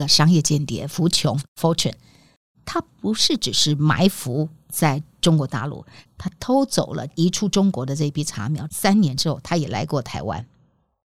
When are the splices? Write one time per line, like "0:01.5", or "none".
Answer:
none